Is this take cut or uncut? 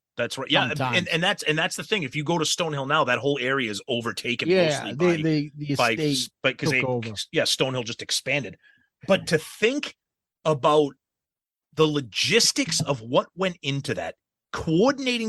uncut